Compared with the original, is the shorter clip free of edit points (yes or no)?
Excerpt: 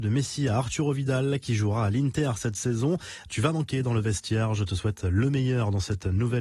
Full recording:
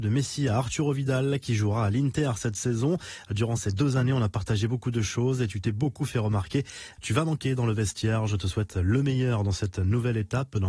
no